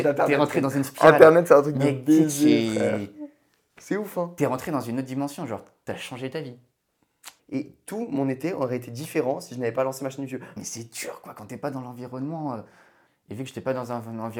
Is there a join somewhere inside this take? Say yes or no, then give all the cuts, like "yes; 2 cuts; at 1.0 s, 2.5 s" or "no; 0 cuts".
yes; 3 cuts; at 7.4 s, 10.6 s, 13.1 s